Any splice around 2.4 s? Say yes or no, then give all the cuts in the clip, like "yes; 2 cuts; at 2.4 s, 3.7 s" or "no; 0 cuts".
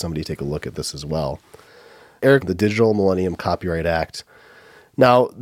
yes; 1 cut; at 2.4 s